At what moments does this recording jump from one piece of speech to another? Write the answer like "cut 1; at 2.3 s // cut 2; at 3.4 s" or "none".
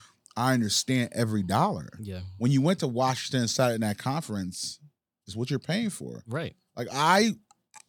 none